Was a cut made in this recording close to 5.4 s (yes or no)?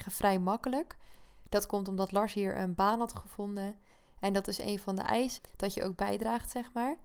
yes